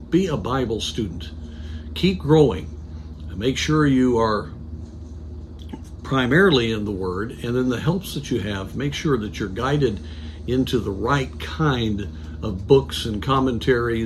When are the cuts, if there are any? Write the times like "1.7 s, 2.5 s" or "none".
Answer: none